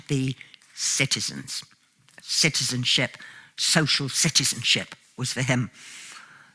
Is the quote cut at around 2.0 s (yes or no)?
no